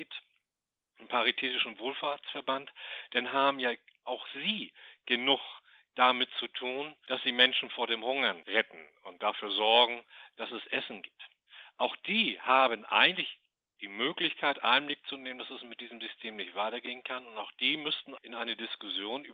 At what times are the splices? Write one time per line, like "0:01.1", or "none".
0:18.2